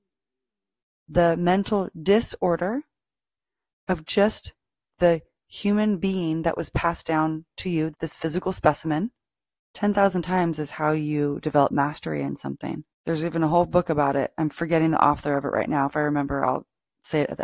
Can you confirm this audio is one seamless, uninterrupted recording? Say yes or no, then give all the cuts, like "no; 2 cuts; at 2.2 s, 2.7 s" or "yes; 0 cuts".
no; 3 cuts; at 7.9 s, 9.6 s, 12.9 s